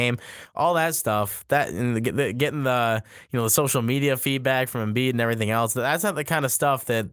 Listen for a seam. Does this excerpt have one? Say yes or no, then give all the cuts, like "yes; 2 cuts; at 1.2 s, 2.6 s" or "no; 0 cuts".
no; 0 cuts